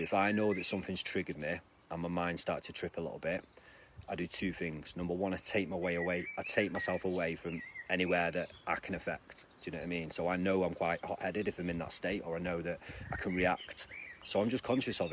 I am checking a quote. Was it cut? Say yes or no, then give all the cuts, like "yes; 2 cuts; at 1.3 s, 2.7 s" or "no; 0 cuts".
no; 0 cuts